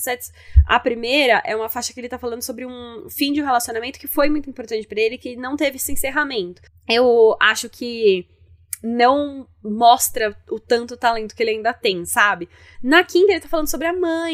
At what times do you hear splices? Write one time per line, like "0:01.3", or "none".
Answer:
0:06.7
0:12.7

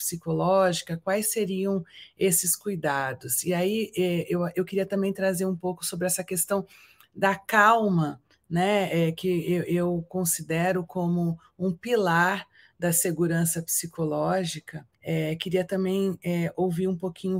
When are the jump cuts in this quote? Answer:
0:14.9

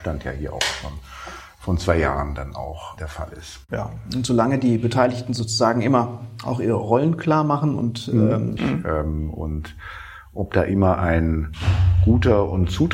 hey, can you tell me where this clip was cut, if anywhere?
0:03.0
0:08.6

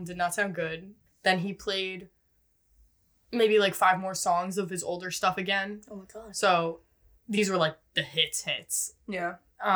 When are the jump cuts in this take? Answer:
none

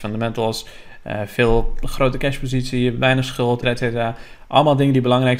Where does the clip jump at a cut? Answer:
0:03.6

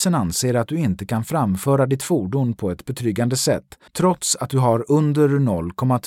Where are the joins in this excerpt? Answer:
0:03.9

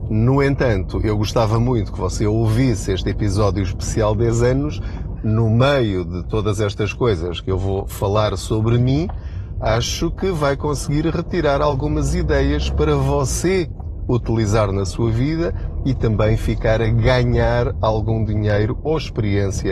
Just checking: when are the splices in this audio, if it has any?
0:05.2

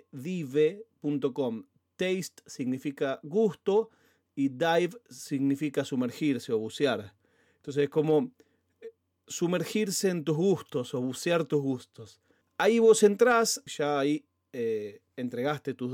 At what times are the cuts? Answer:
0:12.4
0:13.7

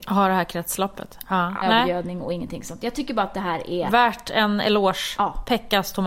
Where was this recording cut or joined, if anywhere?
0:01.6

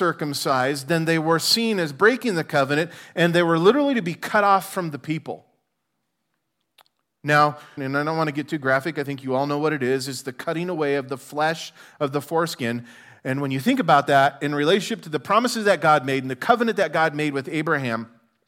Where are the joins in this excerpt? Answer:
0:07.8

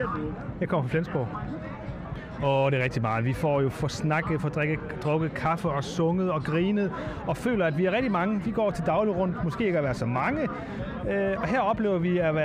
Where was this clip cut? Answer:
none

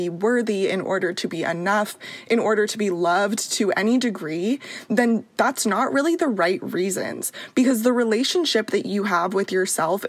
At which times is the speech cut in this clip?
none

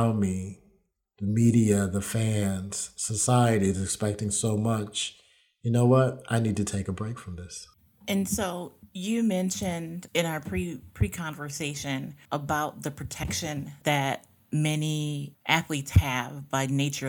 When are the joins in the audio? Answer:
none

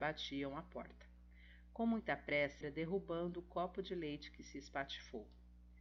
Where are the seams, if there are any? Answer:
0:02.6

